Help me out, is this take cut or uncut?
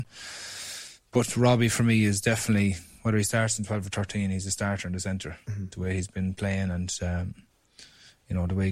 uncut